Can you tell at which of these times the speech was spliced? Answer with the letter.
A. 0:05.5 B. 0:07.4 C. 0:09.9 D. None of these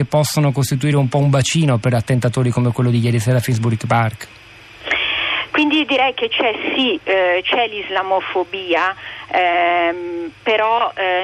A